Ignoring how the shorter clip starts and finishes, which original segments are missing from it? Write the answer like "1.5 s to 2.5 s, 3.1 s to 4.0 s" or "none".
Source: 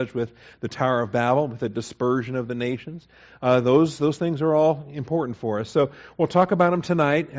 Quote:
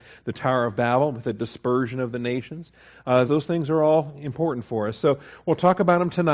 3.6 s to 4.0 s